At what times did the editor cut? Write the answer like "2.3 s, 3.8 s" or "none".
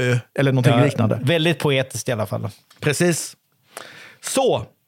1.2 s